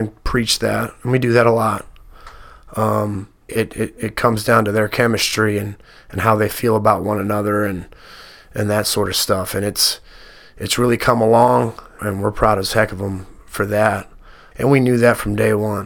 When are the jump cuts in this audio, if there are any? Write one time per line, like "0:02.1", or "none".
0:03.5
0:12.0
0:14.5